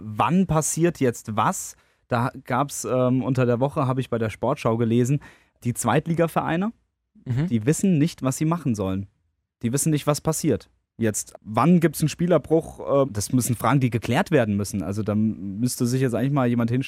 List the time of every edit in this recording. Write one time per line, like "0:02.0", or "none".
0:05.6
0:11.3
0:13.0